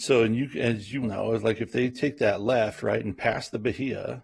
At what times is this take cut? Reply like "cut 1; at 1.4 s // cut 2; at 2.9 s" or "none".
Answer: cut 1; at 1.0 s